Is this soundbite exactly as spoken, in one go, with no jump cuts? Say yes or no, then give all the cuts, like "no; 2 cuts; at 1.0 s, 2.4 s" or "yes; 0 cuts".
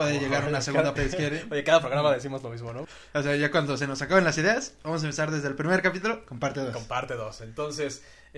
no; 2 cuts; at 1.0 s, 2.8 s